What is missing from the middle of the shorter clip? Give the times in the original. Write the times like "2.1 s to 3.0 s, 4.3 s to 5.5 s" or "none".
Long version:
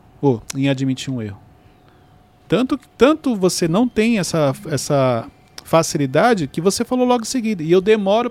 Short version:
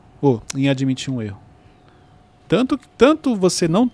none